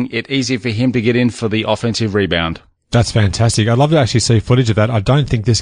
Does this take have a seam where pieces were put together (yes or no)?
no